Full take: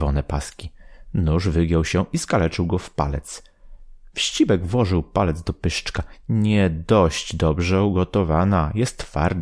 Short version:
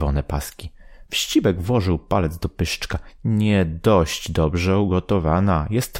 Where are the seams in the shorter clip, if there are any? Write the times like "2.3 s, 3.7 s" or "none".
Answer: 1.1 s